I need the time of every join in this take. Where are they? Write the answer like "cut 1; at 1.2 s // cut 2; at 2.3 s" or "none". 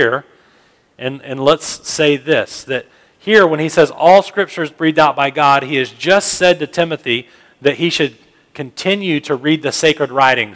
none